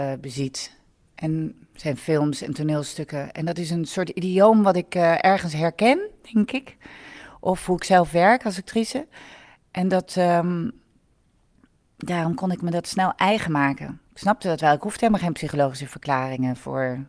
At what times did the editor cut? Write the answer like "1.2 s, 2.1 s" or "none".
none